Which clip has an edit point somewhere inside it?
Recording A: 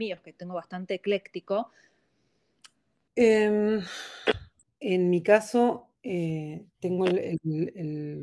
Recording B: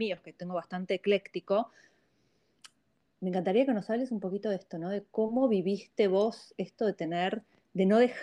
A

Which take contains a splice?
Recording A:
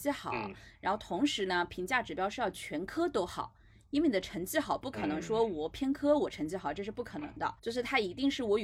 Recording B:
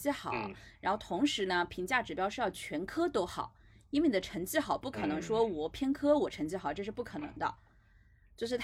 A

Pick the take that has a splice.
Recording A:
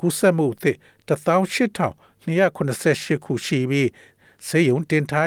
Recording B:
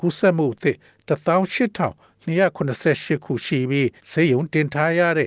B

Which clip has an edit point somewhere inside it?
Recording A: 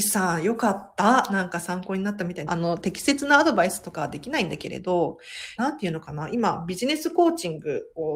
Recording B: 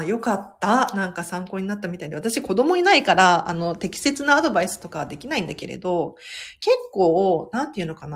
A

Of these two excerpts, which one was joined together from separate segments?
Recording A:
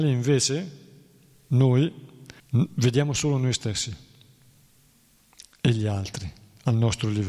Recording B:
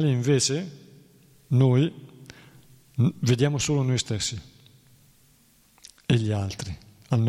A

